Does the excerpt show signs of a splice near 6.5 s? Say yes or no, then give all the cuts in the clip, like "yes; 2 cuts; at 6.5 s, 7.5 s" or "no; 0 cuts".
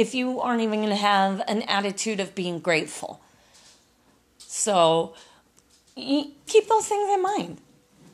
yes; 1 cut; at 6.5 s